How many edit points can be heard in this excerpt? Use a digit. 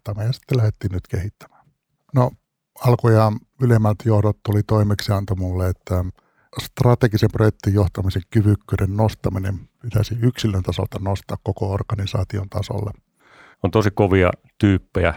2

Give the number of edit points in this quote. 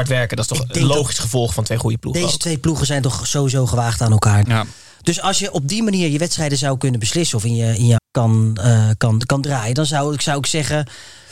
2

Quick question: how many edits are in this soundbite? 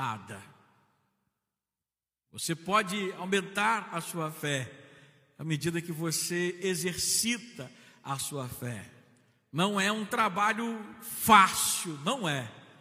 0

